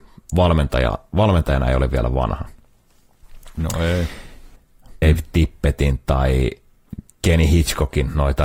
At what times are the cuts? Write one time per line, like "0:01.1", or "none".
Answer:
0:05.0